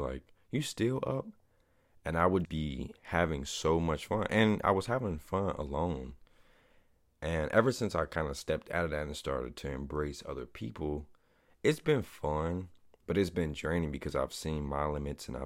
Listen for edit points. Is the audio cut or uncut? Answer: cut